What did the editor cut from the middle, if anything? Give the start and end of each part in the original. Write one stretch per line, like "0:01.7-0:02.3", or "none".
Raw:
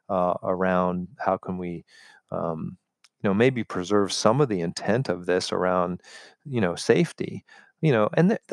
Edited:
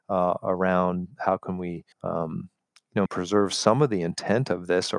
0:01.9-0:02.2
0:03.3-0:03.6